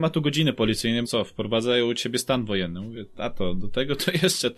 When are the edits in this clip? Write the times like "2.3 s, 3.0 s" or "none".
1.0 s